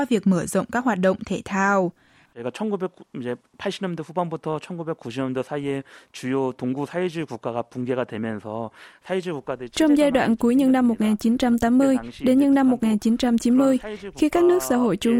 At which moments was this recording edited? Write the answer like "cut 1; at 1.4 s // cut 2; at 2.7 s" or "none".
cut 1; at 2.3 s